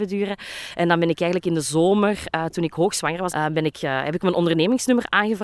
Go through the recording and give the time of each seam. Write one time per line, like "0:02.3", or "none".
0:03.3